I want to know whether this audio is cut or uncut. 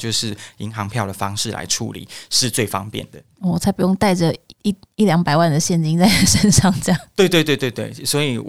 cut